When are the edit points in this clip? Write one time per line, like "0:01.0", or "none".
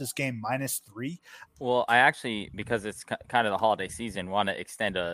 0:01.4